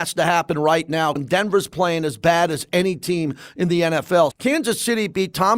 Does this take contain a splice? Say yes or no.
yes